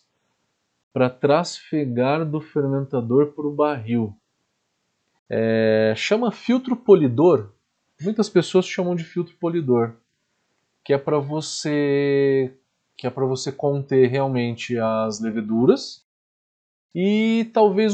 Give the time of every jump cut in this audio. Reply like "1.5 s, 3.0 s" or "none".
5.2 s